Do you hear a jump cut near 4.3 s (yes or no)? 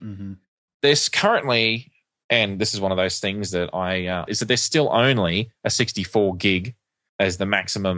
yes